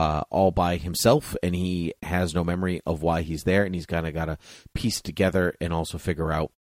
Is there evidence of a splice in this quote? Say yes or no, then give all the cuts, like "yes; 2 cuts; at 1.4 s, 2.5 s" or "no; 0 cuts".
no; 0 cuts